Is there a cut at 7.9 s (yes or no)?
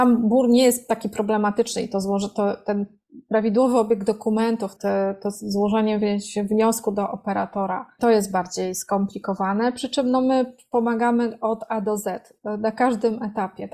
no